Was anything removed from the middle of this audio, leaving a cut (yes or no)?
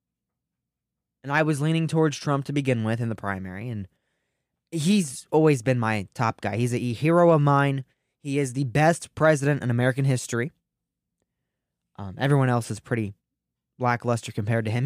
no